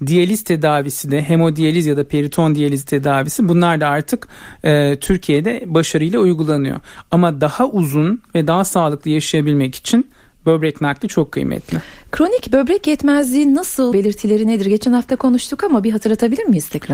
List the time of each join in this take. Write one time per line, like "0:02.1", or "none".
0:13.9